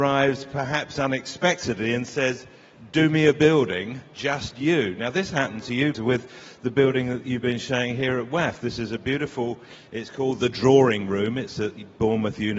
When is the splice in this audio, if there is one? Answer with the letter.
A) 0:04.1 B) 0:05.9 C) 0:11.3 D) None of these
B